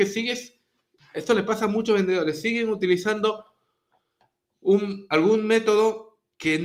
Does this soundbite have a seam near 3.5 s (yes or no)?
no